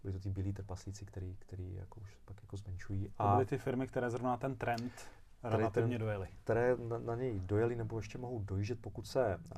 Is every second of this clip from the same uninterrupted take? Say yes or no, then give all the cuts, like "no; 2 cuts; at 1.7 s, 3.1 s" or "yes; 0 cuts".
yes; 0 cuts